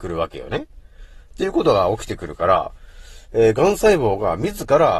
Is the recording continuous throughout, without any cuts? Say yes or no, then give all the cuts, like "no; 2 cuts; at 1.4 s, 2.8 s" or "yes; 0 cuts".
no; 1 cut; at 1.3 s